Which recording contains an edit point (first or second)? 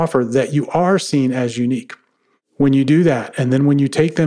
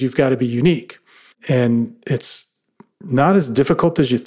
second